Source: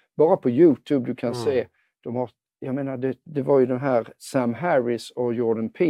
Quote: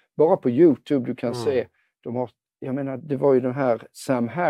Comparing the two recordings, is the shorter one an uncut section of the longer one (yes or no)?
no